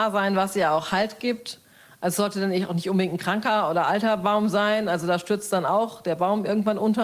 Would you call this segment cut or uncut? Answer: uncut